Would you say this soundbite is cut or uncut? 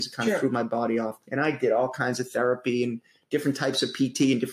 cut